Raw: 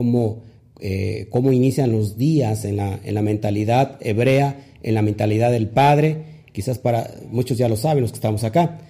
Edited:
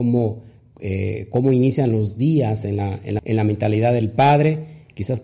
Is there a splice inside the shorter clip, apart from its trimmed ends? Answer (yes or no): yes